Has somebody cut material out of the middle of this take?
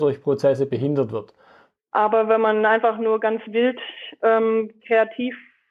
yes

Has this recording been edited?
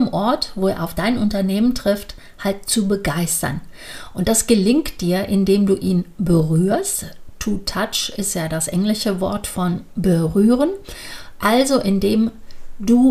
no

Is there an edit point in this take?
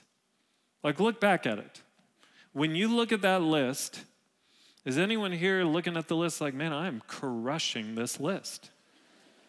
no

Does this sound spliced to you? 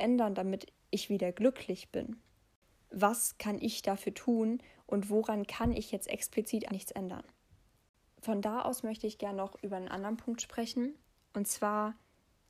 yes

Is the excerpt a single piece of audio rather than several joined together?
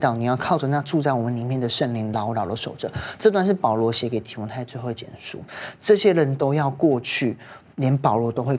yes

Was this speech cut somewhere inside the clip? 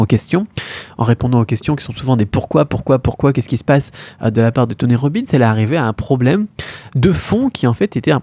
no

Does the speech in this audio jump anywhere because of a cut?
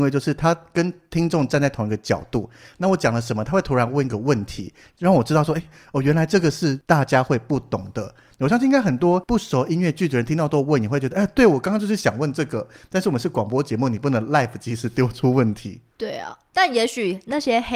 yes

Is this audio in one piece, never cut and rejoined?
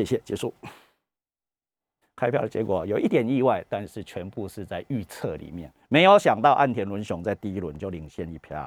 no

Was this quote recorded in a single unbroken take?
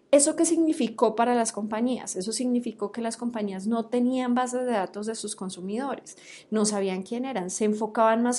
yes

